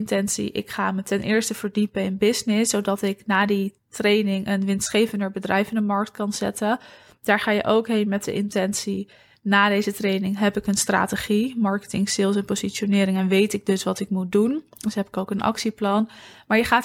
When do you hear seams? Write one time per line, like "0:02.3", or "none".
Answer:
0:03.8